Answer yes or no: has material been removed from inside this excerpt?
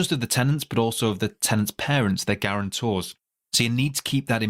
no